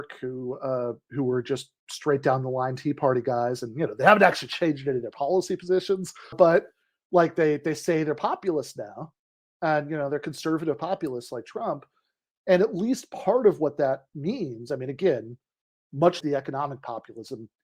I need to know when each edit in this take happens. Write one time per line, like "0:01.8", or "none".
0:06.3
0:16.2